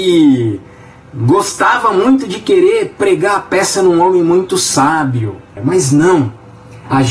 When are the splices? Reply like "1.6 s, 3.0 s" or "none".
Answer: 5.6 s